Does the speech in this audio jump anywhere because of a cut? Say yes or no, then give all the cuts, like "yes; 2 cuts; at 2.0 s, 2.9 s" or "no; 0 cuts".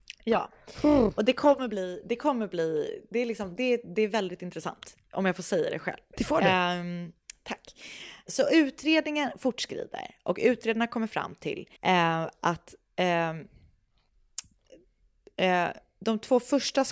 yes; 2 cuts; at 8.3 s, 11.8 s